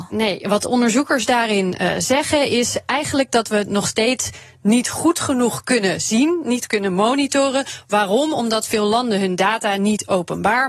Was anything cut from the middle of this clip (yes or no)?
no